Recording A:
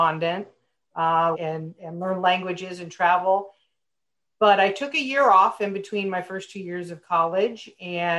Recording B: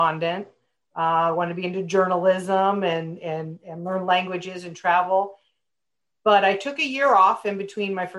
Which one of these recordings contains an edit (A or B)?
A